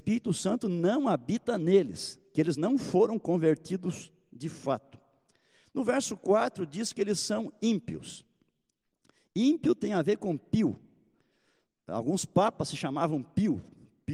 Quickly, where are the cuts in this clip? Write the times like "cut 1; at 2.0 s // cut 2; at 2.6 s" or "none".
none